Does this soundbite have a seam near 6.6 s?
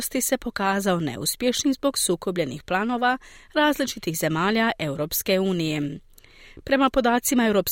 no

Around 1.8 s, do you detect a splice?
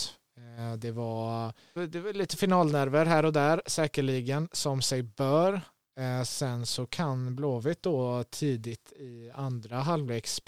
yes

